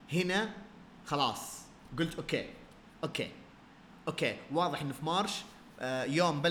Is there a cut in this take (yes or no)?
no